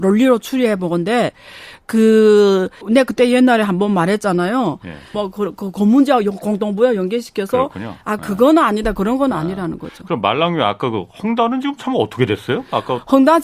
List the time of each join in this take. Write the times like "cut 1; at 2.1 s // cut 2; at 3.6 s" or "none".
cut 1; at 2.8 s // cut 2; at 5.1 s